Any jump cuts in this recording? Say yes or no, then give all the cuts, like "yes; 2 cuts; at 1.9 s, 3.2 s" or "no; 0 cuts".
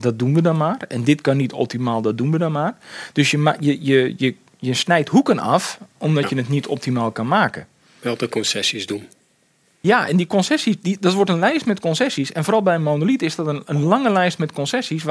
no; 0 cuts